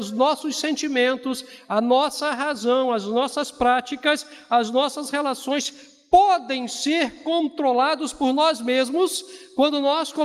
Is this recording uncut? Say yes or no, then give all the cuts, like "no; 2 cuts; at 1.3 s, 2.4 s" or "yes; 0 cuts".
yes; 0 cuts